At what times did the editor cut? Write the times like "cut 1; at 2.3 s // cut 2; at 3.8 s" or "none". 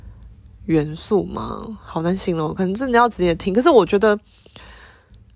none